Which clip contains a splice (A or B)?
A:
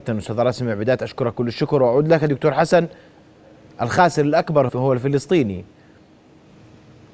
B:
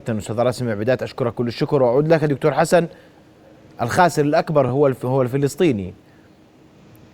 A